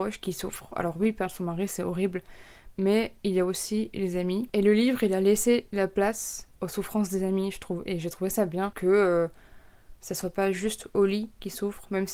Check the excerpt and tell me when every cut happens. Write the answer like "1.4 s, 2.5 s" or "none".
none